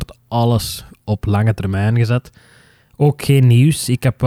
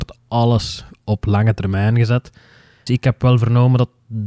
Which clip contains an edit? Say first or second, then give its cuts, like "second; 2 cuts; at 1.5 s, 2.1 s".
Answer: second; 1 cut; at 2.9 s